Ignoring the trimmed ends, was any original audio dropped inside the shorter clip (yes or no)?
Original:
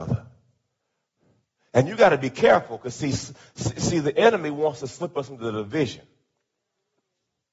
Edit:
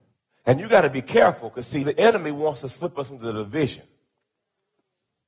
yes